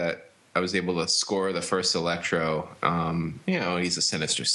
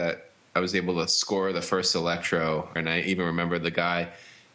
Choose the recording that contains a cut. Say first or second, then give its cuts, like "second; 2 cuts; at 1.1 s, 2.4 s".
second; 1 cut; at 2.8 s